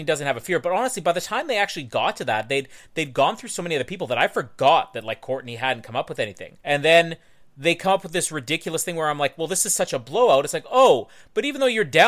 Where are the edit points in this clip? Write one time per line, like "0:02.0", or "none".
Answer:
0:06.6